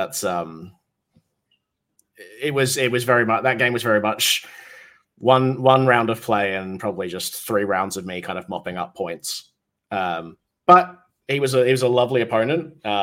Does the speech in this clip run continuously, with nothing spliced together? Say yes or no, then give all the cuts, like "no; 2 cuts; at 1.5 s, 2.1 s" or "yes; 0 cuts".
yes; 0 cuts